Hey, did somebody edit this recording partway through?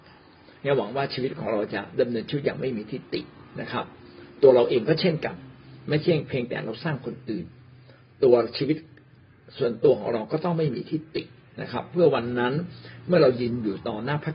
no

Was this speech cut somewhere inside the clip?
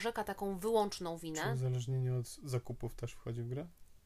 no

